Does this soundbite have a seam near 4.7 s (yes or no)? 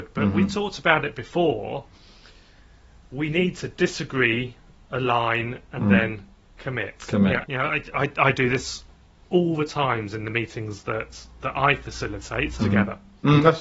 no